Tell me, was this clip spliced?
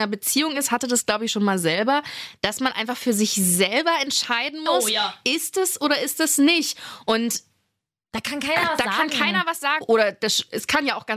yes; 1 cut; at 9.8 s

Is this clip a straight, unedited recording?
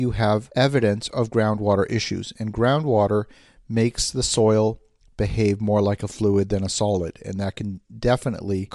yes; 0 cuts

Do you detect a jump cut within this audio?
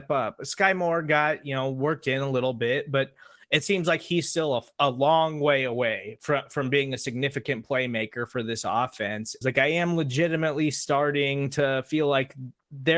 yes; 1 cut; at 9.4 s

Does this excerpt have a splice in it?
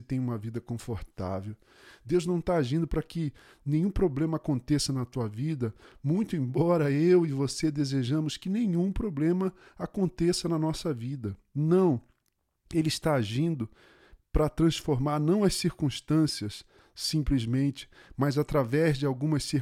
no; 0 cuts

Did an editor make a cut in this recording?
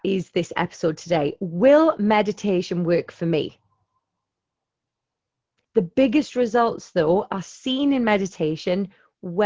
yes; 1 cut; at 5.6 s

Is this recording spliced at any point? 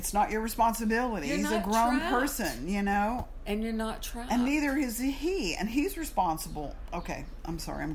no; 0 cuts

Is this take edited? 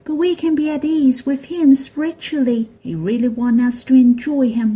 yes; 1 cut; at 2.8 s

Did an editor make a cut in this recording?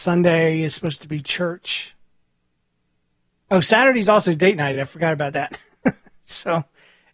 no; 0 cuts

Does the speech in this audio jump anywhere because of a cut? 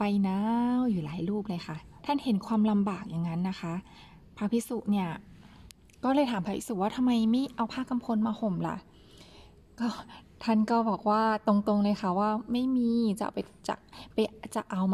yes; 1 cut; at 2.0 s

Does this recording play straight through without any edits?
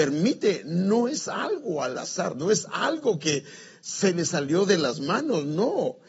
yes; 0 cuts

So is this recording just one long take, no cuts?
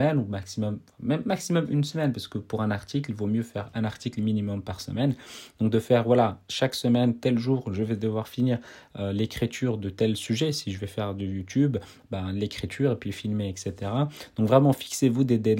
yes; 0 cuts

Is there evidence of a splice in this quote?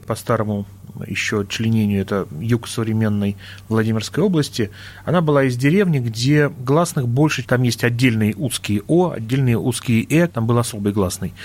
yes; 2 cuts; at 7.4 s, 10.3 s

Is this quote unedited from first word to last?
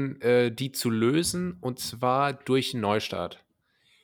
yes; 0 cuts

